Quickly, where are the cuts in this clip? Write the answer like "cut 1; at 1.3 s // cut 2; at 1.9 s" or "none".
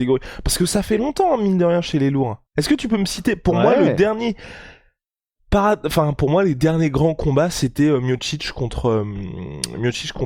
cut 1; at 2.5 s

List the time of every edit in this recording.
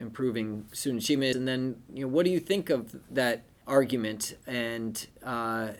cut 1; at 1.3 s // cut 2; at 3.6 s

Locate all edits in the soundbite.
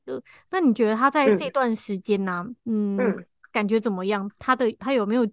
cut 1; at 2.6 s

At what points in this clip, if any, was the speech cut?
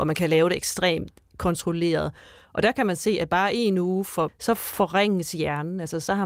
cut 1; at 4.3 s

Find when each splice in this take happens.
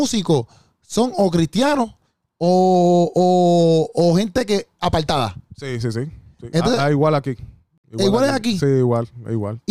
none

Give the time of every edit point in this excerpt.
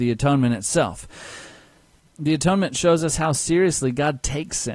cut 1; at 2.1 s

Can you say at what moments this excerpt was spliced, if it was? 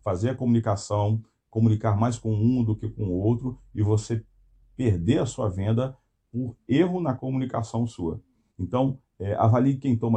cut 1; at 8.5 s

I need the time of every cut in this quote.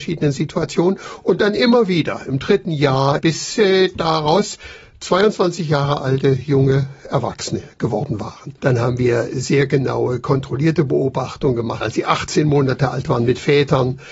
cut 1; at 3.2 s // cut 2; at 8.6 s // cut 3; at 11.8 s

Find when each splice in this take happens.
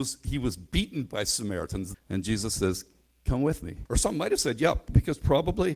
cut 1; at 1.9 s // cut 2; at 3.9 s

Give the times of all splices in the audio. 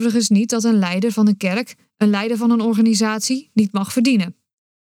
none

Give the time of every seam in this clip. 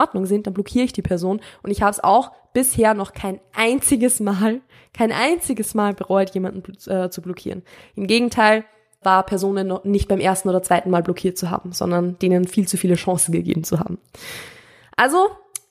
cut 1; at 9.0 s

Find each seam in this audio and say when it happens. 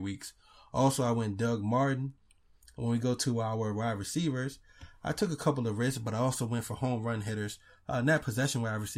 none

